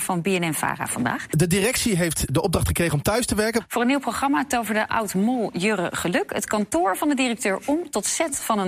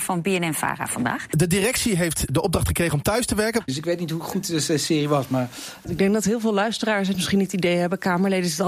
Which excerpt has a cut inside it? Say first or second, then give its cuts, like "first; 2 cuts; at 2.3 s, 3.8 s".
second; 1 cut; at 3.7 s